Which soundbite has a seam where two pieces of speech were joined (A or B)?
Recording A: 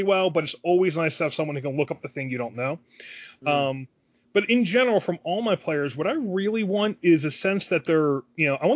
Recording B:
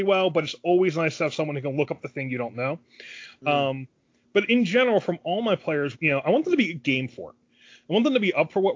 B